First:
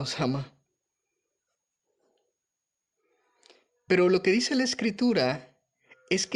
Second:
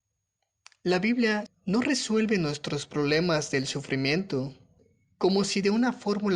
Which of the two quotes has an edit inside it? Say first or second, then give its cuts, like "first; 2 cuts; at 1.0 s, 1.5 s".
second; 1 cut; at 1.5 s